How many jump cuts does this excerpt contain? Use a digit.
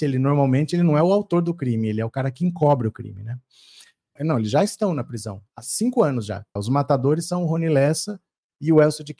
2